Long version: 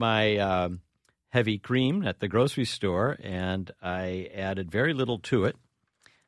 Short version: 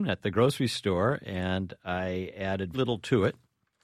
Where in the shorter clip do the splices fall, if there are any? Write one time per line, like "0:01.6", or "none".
0:02.7